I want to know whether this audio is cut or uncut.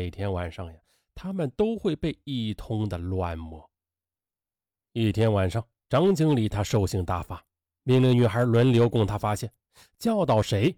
uncut